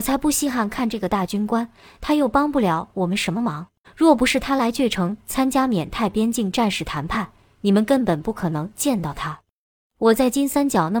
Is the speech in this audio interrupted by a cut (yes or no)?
yes